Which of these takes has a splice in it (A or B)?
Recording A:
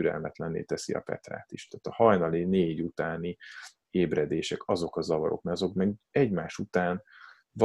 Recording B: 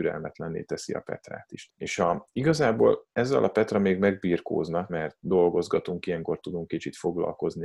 B